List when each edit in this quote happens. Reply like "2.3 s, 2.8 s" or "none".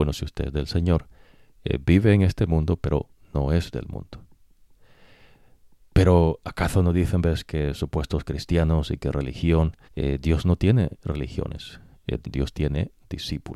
9.9 s, 12.2 s